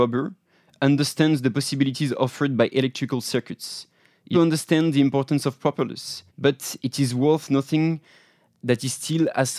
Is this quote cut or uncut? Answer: cut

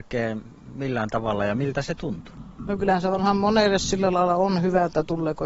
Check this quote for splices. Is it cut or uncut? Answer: uncut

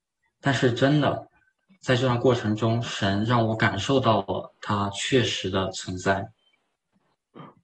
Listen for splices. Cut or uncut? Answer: uncut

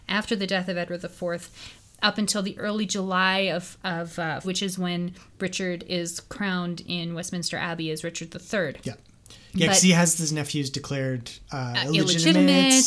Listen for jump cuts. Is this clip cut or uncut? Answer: cut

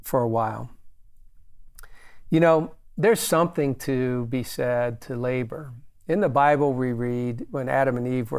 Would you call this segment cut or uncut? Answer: uncut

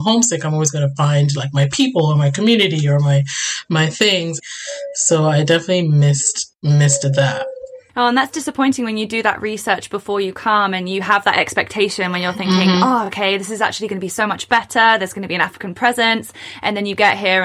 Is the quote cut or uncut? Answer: uncut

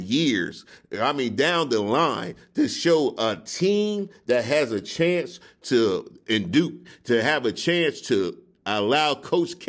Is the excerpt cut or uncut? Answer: uncut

